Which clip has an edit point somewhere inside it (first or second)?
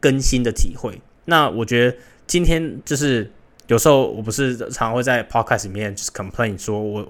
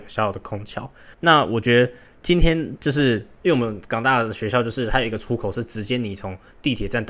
second